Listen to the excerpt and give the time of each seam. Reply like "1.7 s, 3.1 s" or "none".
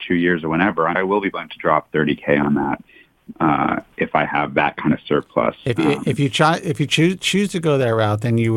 0.9 s